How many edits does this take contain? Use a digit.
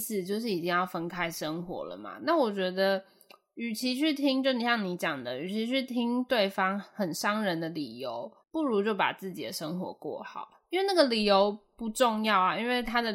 1